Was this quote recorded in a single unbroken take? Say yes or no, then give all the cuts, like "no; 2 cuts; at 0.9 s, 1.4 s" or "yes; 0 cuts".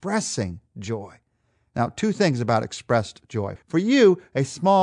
no; 1 cut; at 3.6 s